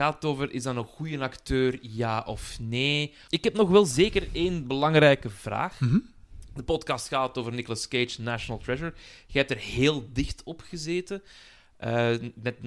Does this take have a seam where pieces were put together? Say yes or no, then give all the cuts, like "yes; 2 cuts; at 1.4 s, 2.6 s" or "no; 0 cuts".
yes; 1 cut; at 3.3 s